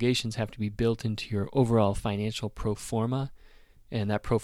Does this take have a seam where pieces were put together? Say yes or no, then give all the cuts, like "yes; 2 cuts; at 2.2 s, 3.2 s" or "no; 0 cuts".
no; 0 cuts